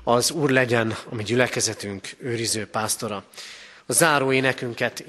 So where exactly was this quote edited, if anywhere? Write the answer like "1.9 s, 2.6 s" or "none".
none